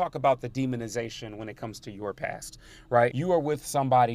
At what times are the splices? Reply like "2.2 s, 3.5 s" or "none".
3.1 s